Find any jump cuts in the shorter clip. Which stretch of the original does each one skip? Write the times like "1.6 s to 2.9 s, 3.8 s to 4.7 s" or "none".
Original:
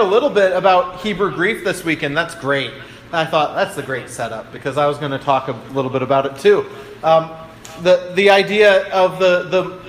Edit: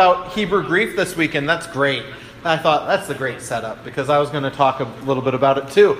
none